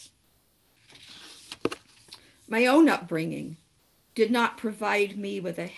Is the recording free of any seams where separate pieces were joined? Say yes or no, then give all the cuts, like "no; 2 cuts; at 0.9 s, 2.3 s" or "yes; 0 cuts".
yes; 0 cuts